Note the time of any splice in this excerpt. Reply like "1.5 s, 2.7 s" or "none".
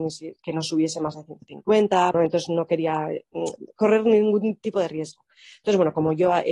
2.1 s